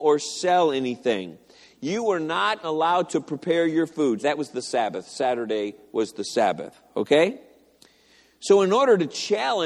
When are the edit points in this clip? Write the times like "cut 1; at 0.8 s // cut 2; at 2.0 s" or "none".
cut 1; at 2.6 s // cut 2; at 4.2 s